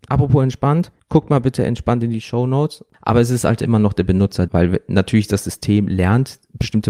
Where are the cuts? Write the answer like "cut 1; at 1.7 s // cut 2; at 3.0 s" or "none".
cut 1; at 2.9 s // cut 2; at 4.5 s